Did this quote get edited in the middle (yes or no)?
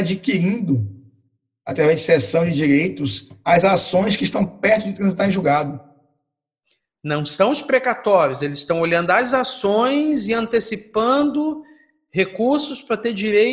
no